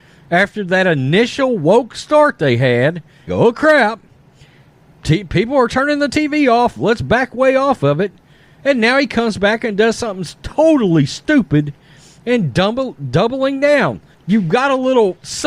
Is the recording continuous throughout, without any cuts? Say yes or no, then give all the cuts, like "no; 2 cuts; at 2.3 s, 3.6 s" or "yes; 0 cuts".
no; 2 cuts; at 3.3 s, 14.1 s